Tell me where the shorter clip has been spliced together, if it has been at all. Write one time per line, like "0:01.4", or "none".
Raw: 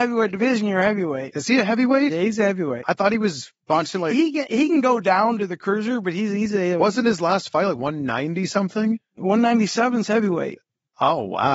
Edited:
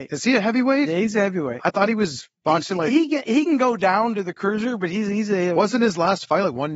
none